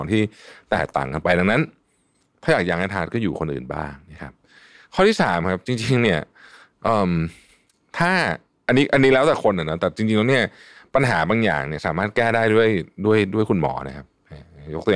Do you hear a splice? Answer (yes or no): no